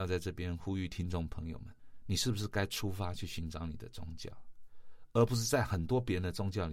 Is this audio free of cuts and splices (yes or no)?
yes